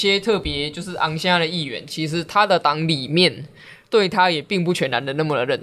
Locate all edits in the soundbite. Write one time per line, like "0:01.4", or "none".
none